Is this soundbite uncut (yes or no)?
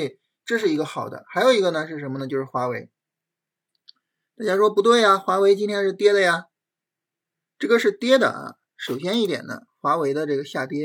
yes